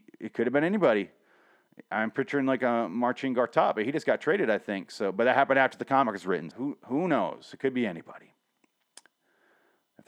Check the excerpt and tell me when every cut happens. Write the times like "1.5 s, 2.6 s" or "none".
6.5 s